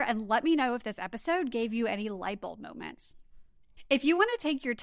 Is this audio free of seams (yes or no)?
yes